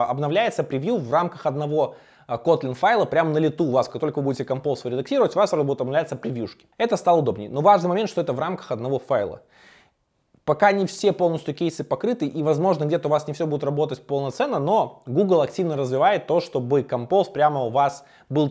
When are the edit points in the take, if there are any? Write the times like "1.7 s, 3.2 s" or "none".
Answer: 6.7 s